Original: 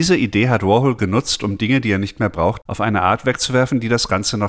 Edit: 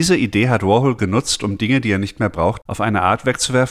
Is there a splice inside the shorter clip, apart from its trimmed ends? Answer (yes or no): no